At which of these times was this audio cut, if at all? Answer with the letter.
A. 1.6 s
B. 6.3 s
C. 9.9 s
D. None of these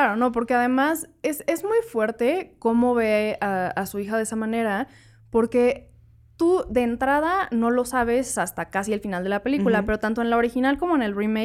D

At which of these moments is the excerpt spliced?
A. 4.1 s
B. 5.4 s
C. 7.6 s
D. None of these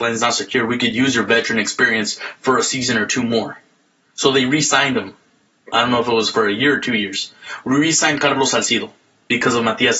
D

